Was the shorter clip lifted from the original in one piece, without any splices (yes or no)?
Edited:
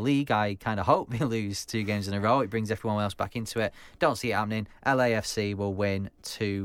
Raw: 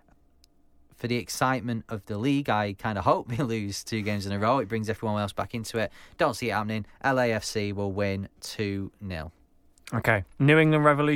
yes